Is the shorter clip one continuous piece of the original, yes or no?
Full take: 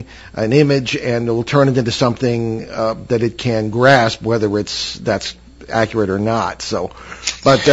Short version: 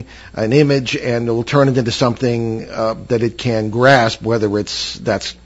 yes